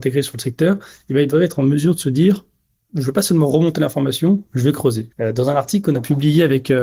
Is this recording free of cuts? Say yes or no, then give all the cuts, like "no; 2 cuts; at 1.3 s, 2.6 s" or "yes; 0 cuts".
no; 1 cut; at 5.1 s